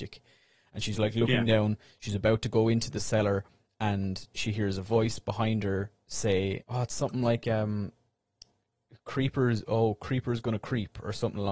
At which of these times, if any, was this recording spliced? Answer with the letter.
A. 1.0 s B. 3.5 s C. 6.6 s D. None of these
C